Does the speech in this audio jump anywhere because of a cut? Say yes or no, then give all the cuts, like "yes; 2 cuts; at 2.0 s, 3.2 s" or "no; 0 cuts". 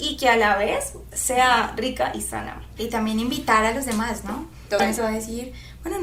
yes; 3 cuts; at 1.1 s, 2.8 s, 5.0 s